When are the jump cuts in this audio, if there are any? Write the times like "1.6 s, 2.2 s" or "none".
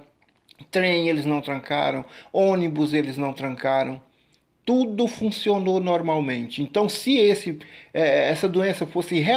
none